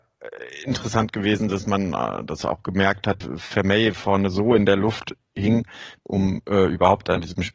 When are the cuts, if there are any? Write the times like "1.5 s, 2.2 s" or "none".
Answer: 3.2 s, 6.0 s